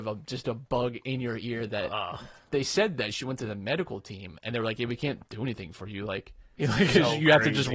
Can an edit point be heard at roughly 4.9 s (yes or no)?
no